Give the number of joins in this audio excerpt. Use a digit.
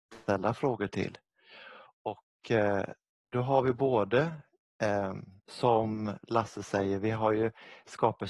2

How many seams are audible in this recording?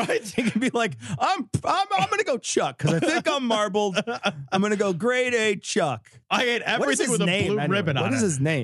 0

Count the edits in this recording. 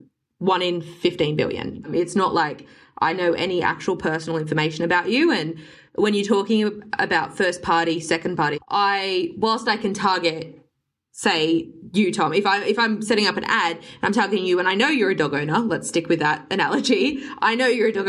1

